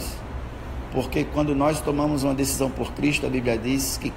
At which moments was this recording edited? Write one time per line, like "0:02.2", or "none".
none

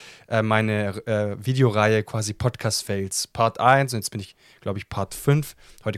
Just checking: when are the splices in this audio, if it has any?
none

